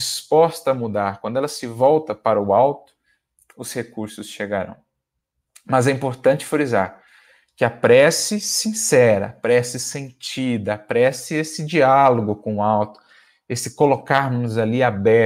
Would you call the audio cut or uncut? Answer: uncut